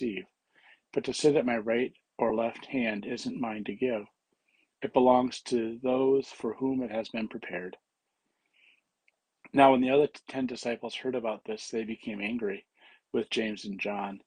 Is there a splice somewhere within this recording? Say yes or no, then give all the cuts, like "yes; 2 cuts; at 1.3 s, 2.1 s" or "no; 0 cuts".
no; 0 cuts